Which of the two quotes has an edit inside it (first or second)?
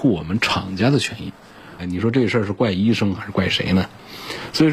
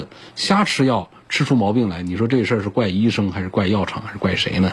first